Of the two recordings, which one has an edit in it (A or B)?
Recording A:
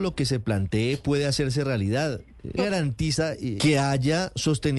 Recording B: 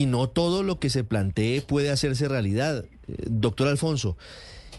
A